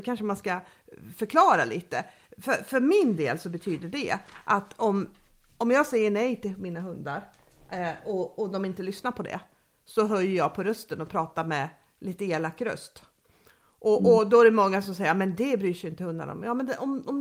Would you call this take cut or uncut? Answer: uncut